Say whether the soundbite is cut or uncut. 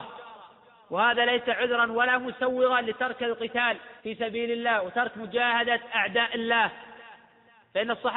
cut